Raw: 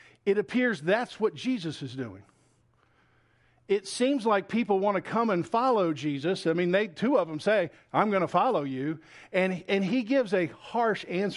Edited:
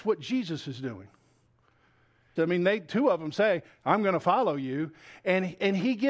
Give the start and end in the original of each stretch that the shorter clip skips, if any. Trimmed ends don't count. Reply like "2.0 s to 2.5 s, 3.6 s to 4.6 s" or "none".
3.5 s to 6.4 s